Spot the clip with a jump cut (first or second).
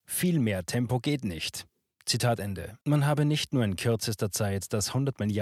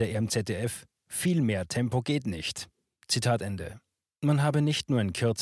first